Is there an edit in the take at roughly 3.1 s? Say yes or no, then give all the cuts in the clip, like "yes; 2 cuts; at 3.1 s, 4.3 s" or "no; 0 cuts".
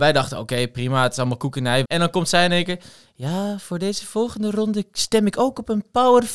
no; 1 cut; at 1.8 s